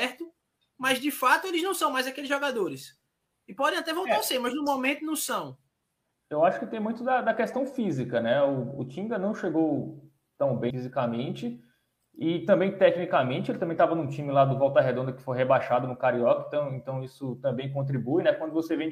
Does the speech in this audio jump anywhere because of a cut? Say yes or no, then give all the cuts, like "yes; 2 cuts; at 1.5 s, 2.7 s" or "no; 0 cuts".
yes; 1 cut; at 10.7 s